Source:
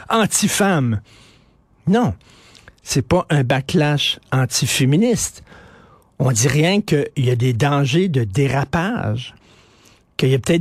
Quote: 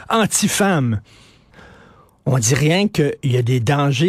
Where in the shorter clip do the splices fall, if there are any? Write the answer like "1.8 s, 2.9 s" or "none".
1.5 s

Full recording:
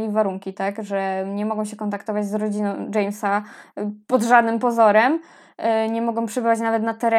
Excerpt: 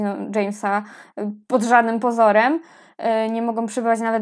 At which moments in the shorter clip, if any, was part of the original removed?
none

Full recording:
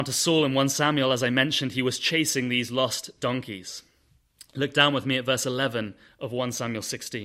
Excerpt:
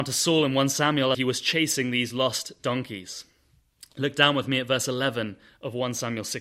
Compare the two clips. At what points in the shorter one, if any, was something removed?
1.1 s

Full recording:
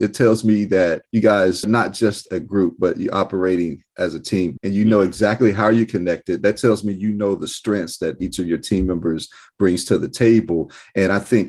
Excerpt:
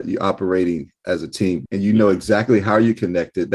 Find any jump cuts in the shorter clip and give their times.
none

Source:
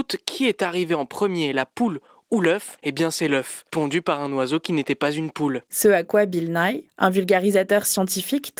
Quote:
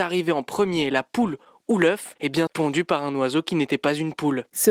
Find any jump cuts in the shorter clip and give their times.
2.5 s

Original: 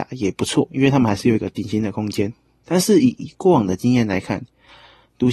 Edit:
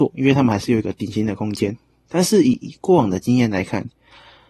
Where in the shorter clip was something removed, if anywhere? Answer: none

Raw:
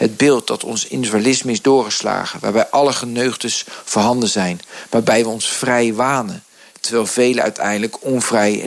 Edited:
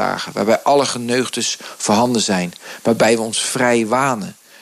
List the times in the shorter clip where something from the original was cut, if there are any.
none

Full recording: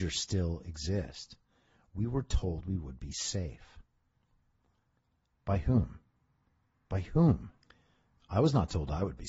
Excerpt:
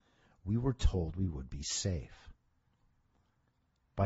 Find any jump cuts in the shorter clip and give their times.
none

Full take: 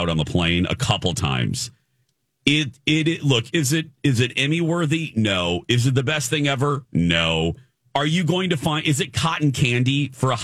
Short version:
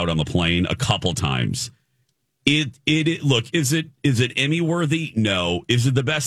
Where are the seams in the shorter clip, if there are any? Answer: none

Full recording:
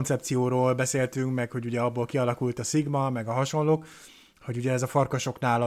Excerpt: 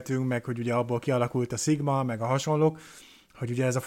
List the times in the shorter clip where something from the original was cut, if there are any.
none

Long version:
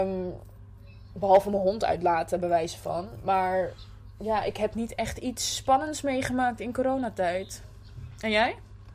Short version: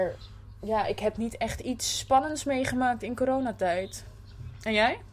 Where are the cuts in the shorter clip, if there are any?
none

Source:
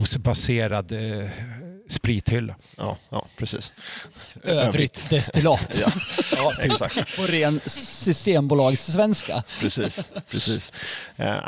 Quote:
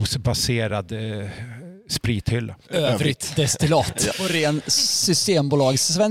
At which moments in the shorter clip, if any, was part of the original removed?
2.7 s, 4.1 s

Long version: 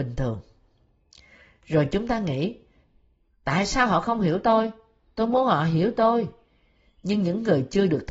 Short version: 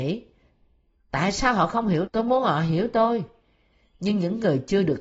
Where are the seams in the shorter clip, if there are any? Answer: 2.1 s

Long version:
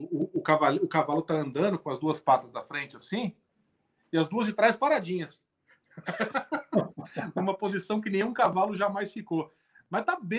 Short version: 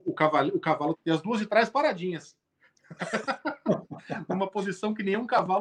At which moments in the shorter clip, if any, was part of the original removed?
0.9 s

